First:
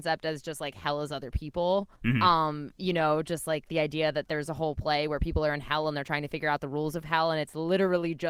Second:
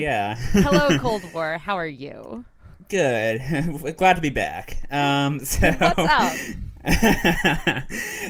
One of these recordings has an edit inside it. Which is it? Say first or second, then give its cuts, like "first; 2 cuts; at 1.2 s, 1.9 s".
first; 1 cut; at 2.0 s